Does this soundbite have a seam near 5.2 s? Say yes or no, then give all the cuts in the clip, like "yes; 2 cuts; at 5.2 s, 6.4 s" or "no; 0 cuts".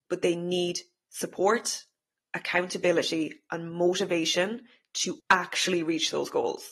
yes; 1 cut; at 5.2 s